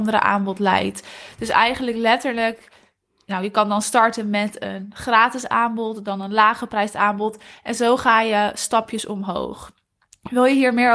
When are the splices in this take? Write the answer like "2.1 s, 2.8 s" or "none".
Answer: none